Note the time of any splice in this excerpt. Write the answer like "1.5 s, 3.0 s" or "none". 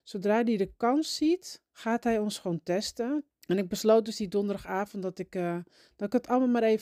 1.7 s, 3.3 s